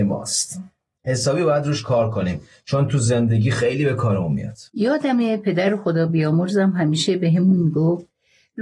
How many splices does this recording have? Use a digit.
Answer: 1